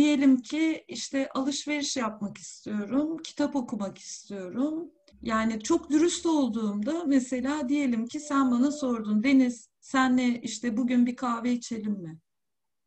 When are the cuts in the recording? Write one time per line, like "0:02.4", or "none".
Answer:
0:05.1